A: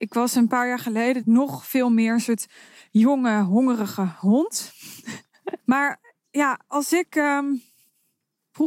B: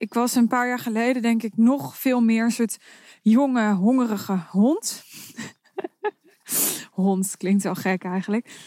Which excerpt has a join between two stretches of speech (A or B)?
A